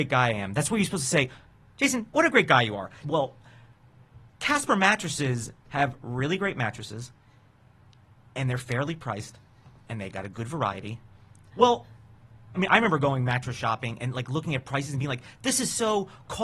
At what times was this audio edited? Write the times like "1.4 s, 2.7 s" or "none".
3.0 s, 11.5 s, 12.5 s